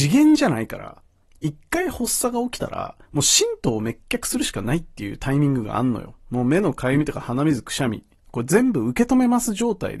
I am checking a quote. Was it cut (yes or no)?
yes